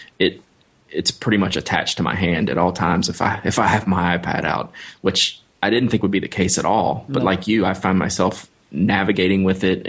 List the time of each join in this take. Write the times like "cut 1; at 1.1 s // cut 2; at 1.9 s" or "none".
none